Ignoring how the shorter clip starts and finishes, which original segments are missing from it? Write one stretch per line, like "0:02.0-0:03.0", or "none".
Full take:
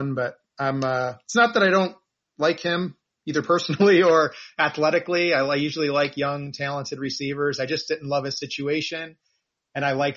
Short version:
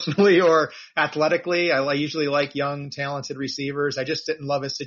none